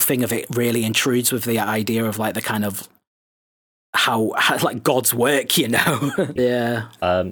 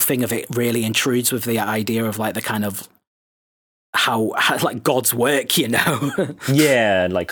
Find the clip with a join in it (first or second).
first